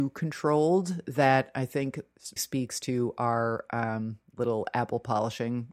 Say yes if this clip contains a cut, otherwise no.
yes